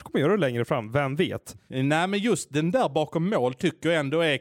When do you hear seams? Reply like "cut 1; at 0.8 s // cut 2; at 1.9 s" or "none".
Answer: cut 1; at 1.7 s